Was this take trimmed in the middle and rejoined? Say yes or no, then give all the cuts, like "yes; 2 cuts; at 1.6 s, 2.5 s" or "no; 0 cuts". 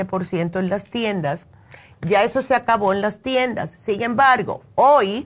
no; 0 cuts